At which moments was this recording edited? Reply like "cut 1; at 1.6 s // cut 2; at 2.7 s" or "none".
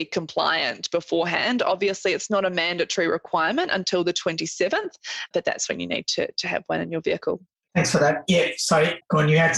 none